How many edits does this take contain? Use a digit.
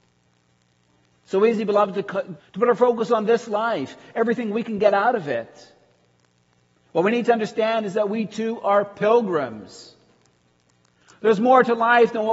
1